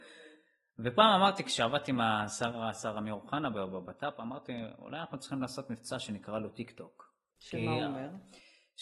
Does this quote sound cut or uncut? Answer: cut